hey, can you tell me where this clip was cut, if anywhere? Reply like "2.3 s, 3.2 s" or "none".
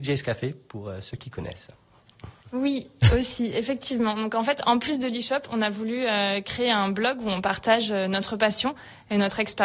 2.4 s